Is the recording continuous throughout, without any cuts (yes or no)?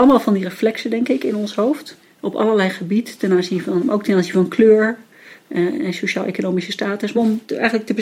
no